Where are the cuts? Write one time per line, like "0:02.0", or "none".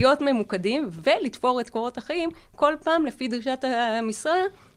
none